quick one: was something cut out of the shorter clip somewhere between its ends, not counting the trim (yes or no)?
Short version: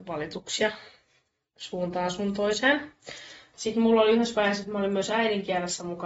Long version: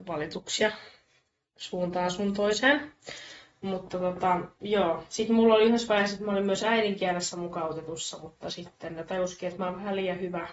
yes